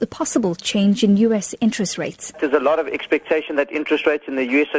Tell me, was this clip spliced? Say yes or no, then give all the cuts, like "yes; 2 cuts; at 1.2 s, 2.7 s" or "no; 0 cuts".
no; 0 cuts